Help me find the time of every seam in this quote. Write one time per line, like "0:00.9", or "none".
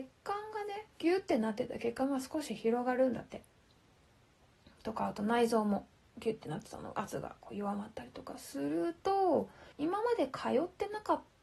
0:00.9
0:09.7